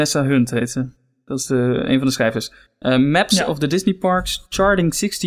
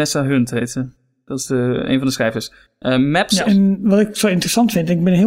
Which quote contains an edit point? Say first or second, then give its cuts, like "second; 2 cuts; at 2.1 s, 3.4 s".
second; 1 cut; at 3.4 s